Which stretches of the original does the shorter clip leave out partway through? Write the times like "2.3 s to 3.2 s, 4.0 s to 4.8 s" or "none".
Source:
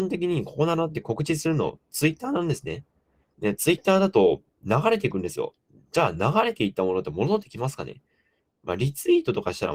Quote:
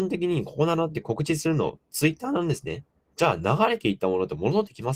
3.1 s to 5.9 s